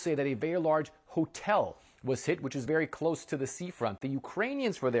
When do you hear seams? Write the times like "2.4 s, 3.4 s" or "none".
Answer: none